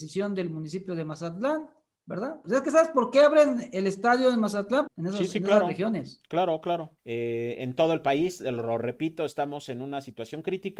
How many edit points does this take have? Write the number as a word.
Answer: three